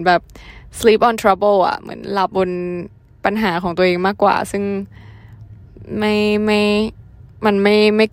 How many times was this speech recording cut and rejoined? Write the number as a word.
one